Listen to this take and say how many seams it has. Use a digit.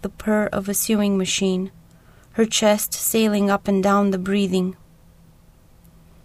0